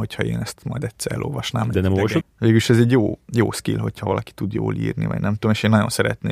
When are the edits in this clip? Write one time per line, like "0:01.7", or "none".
0:02.2